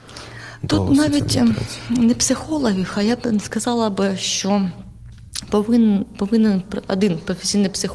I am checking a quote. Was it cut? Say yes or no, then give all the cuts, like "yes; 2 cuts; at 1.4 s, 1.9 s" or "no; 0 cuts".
no; 0 cuts